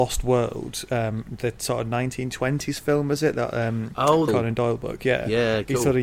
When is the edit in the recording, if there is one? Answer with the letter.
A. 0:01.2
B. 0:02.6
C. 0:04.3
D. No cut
C